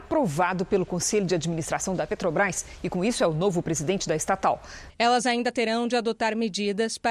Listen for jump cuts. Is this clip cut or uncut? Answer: cut